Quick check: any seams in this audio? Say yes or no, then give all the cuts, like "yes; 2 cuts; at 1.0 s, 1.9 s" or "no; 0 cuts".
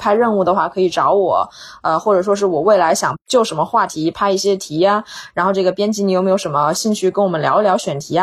no; 0 cuts